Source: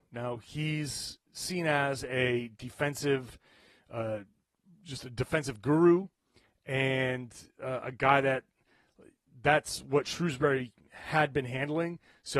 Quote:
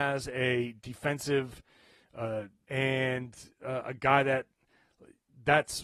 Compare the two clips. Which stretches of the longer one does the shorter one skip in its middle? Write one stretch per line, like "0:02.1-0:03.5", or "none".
0:04.4-0:06.6